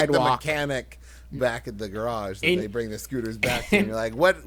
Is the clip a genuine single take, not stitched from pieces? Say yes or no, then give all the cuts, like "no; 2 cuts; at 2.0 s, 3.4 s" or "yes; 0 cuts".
yes; 0 cuts